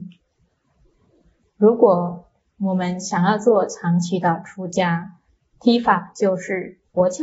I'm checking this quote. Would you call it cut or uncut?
uncut